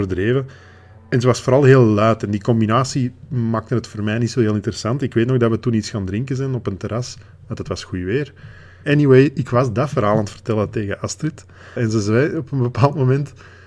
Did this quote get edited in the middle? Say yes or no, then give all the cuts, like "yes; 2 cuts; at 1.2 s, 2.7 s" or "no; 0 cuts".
yes; 2 cuts; at 8.8 s, 11.8 s